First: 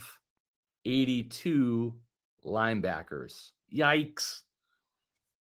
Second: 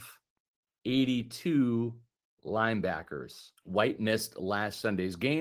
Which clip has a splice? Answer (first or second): second